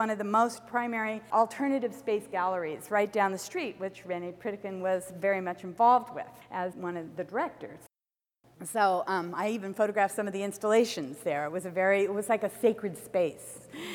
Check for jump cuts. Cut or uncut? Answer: uncut